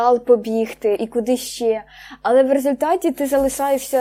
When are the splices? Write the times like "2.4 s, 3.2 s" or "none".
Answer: 1.0 s